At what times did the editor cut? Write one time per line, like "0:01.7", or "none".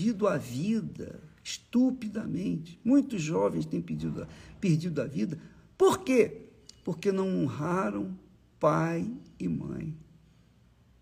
none